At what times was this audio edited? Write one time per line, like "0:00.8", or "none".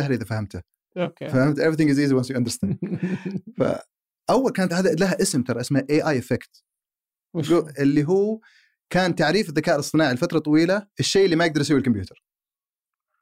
0:04.7
0:10.9